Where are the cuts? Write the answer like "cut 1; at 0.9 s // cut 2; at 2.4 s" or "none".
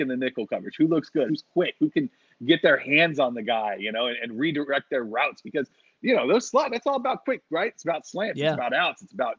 cut 1; at 1.3 s